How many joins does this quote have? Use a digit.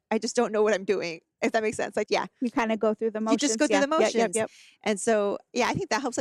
1